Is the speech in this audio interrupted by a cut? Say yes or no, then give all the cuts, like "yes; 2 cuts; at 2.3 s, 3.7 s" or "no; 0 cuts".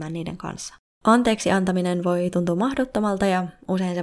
yes; 1 cut; at 0.9 s